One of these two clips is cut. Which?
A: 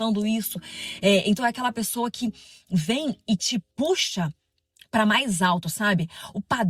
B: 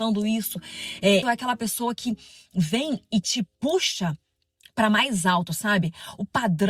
B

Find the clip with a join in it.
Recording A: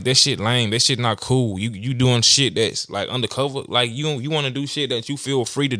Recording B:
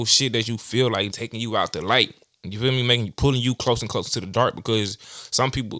B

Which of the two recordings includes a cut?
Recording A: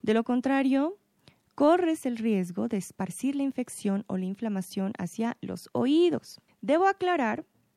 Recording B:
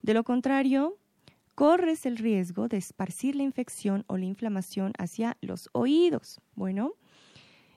A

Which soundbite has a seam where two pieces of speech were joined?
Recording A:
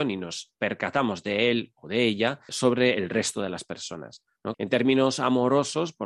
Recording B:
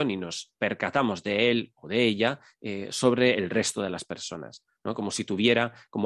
A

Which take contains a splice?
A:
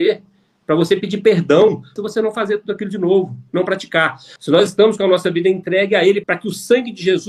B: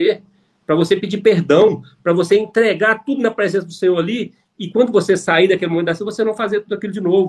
A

